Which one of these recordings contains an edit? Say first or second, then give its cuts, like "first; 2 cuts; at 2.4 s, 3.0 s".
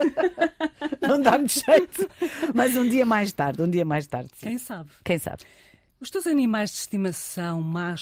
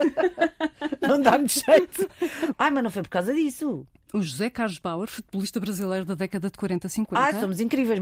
second; 1 cut; at 2.5 s